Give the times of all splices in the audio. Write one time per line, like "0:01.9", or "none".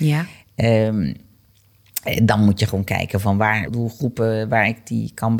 0:03.7

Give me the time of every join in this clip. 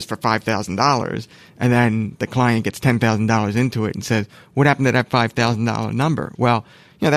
none

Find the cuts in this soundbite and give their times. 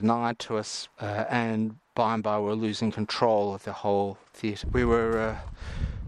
0:00.9
0:04.6

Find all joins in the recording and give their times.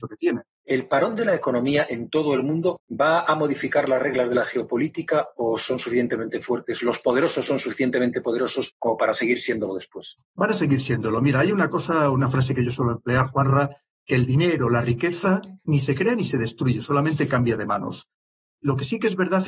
0:18.6

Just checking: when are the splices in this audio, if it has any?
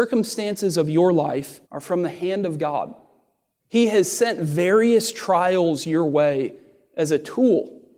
0:01.6
0:03.6

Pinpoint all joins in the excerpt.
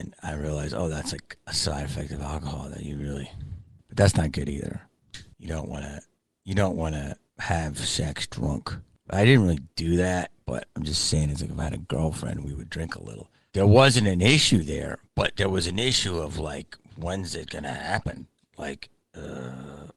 0:13.5
0:15.1

